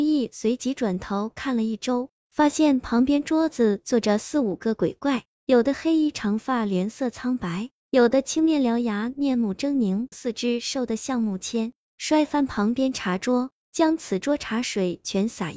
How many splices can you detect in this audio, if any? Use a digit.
2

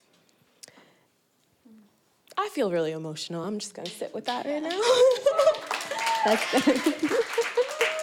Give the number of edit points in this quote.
0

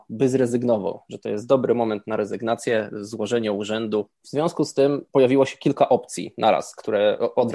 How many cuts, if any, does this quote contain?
1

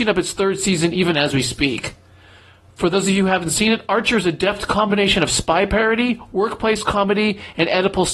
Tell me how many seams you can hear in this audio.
0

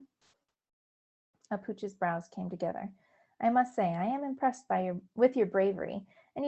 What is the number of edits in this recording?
0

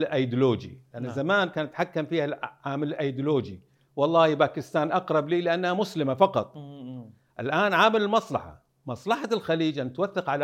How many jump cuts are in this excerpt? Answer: 0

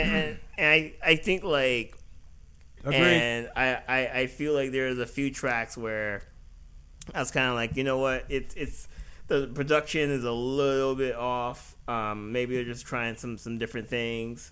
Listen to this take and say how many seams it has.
1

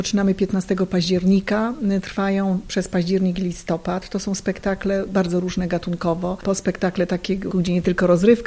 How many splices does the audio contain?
2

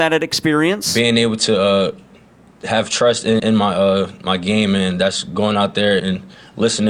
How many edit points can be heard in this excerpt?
2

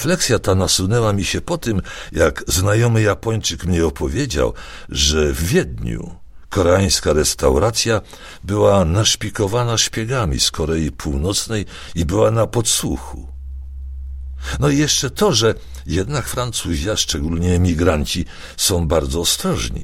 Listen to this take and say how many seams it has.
0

